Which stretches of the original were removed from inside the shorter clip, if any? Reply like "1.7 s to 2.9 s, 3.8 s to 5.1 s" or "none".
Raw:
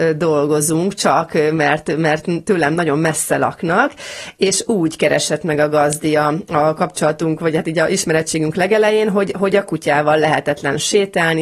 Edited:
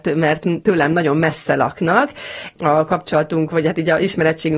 4.4 s to 6.4 s